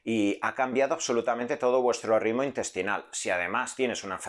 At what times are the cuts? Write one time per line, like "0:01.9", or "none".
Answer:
none